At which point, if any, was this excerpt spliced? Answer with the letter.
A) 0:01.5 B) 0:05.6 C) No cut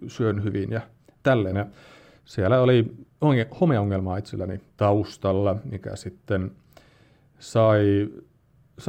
A